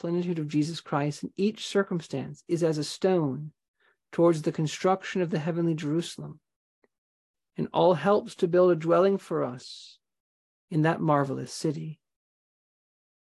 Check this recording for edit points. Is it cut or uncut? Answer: uncut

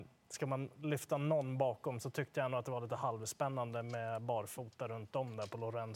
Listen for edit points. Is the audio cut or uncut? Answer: uncut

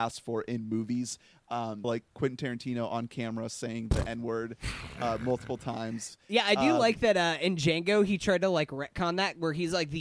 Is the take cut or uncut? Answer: cut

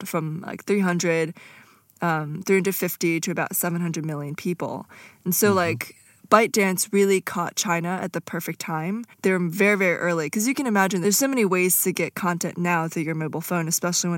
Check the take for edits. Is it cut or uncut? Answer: cut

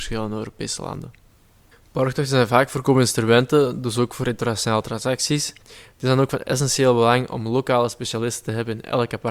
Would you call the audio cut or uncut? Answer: cut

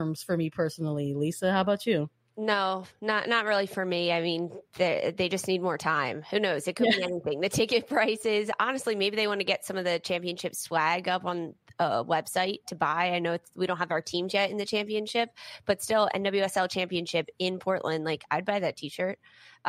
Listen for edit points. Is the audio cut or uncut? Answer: uncut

